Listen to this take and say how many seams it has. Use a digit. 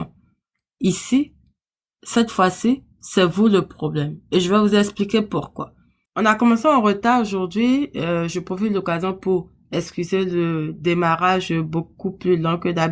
1